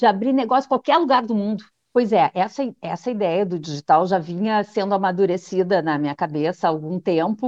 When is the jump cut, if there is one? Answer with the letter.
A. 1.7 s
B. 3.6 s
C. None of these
A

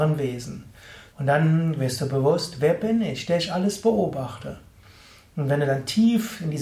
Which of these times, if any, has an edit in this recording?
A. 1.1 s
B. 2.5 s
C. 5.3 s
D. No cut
A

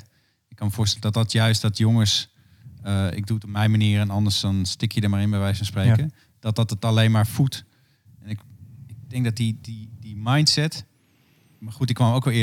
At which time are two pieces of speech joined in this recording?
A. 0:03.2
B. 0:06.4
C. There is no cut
C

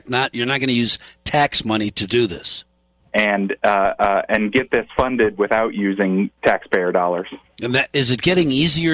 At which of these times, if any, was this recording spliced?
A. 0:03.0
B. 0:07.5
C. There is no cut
A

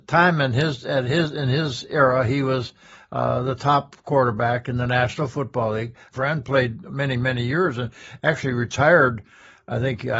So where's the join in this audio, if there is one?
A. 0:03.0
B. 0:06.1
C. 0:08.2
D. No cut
B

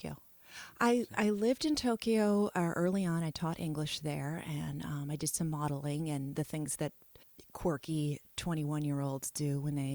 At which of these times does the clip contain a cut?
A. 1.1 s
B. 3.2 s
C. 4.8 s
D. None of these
D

